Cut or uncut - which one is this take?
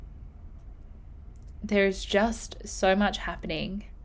uncut